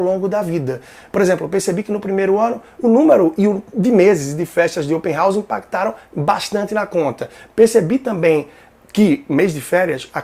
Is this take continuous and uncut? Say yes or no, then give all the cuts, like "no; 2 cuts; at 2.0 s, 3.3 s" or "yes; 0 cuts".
yes; 0 cuts